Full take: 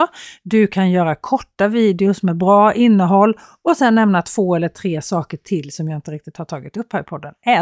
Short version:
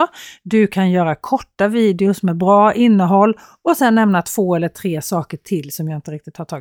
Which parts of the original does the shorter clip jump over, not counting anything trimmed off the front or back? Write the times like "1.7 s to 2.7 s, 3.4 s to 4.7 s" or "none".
none